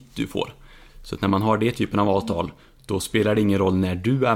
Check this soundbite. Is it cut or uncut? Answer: uncut